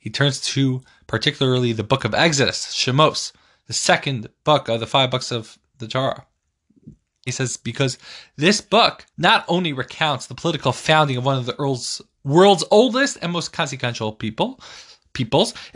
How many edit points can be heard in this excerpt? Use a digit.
2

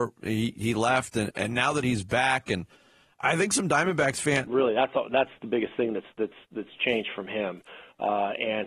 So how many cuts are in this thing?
1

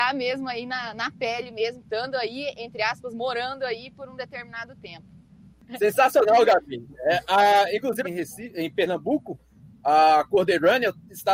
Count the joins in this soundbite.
1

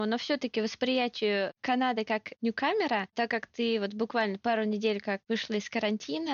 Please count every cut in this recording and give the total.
0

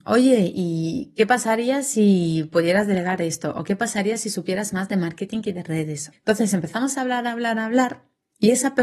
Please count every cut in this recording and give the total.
1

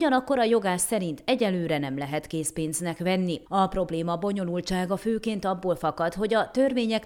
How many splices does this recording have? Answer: 1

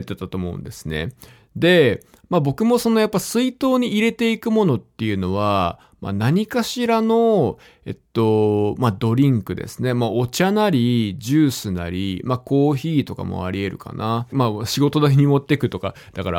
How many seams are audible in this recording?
1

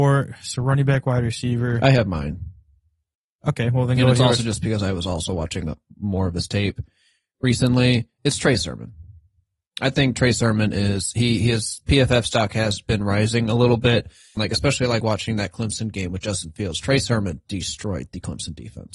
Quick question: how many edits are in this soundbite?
1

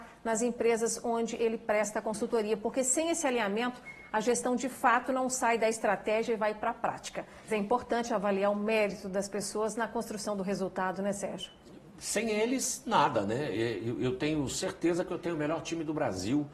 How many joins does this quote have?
1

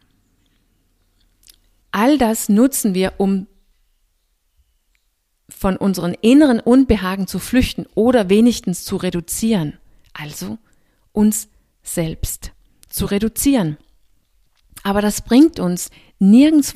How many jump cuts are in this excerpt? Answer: 1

